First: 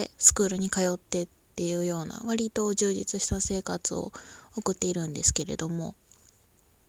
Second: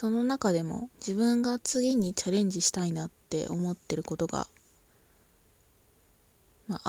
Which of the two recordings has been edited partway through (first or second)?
second